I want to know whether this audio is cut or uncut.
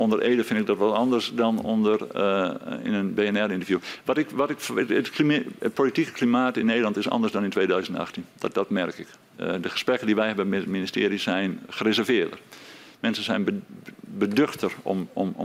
uncut